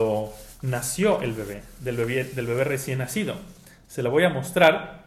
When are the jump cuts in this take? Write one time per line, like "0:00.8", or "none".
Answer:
none